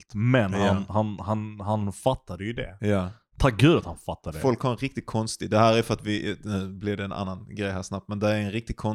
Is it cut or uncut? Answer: uncut